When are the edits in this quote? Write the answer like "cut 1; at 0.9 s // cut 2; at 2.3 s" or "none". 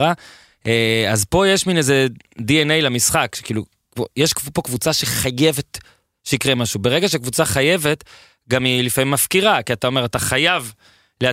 none